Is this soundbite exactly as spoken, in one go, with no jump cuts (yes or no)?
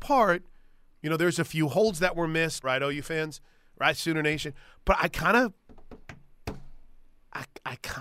no